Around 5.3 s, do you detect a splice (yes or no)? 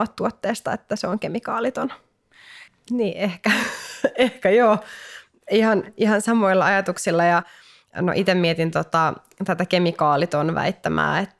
no